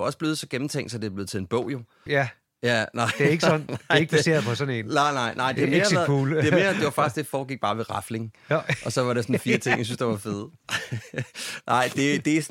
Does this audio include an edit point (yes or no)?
yes